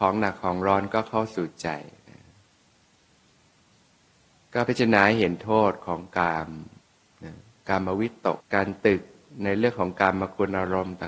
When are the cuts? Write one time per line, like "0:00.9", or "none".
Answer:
0:08.4